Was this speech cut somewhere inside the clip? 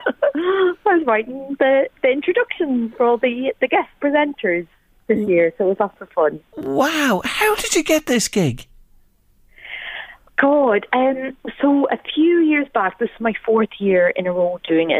no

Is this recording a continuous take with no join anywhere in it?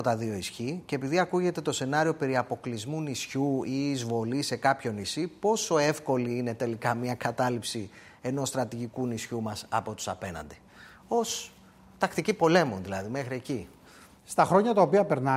yes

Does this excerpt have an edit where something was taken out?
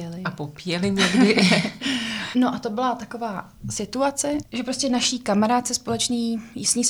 yes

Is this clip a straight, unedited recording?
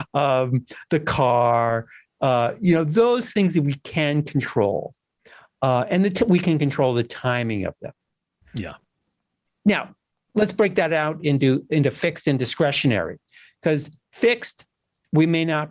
no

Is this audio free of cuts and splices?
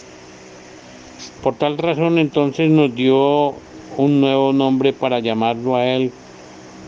no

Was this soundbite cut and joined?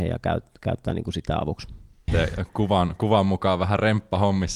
yes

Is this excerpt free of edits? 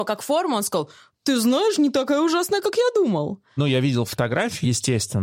yes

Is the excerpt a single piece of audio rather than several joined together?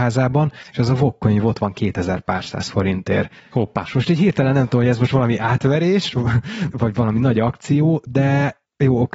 no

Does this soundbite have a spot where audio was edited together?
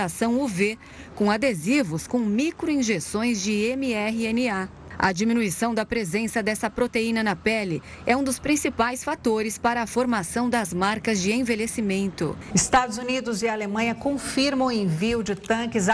yes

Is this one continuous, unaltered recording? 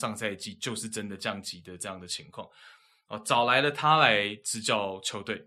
yes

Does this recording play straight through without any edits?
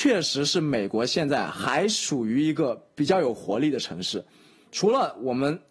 yes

